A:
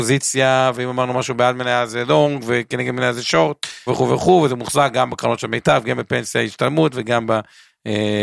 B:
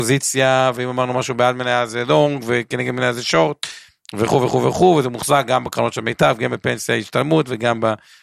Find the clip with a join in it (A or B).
A